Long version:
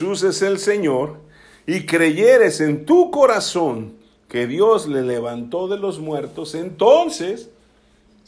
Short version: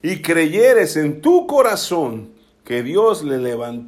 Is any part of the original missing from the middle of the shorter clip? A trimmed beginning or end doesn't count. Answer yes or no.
no